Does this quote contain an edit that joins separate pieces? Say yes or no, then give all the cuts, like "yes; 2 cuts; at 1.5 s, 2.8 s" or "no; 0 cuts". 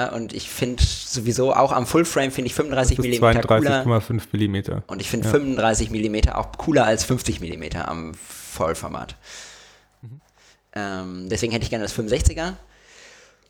yes; 1 cut; at 4.9 s